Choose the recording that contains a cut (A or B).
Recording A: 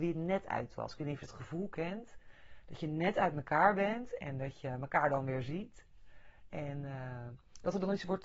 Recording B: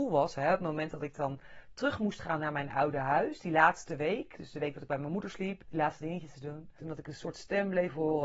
B